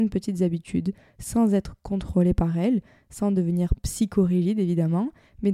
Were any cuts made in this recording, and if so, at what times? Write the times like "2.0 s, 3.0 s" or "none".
none